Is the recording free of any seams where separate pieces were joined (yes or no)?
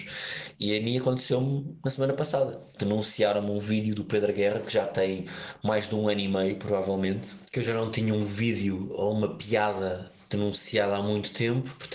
yes